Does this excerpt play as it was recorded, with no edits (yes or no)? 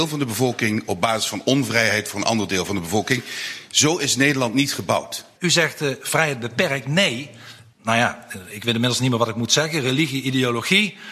no